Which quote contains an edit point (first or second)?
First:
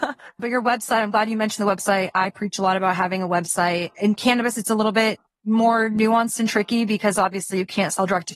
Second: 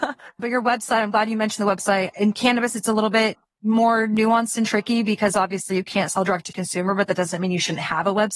second